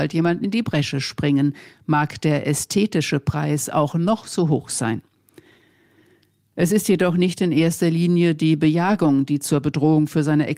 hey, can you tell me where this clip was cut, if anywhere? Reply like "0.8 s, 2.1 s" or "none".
6.5 s